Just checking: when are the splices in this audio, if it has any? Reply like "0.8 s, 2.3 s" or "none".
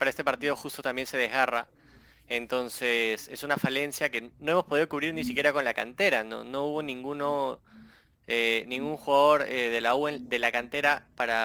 none